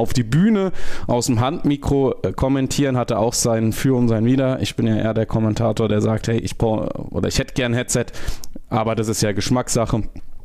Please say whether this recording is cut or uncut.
uncut